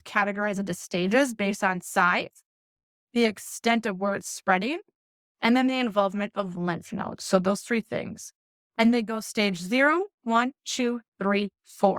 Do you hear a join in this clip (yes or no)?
no